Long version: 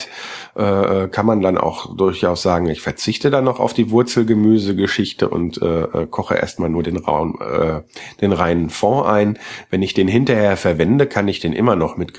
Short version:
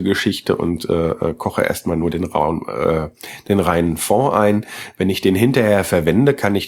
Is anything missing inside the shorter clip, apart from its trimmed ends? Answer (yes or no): no